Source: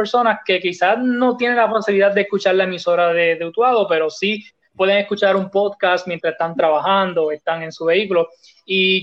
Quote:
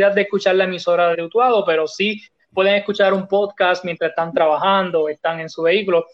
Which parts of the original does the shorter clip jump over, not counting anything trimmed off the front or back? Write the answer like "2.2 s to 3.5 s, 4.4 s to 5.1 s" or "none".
3.1 s to 3.4 s